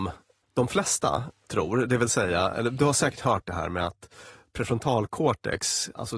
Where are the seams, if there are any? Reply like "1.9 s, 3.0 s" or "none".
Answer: none